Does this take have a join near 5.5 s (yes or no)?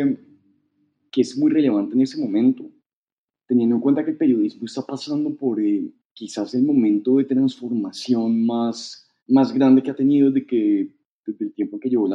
no